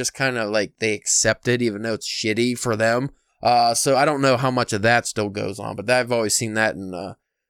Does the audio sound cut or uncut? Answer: uncut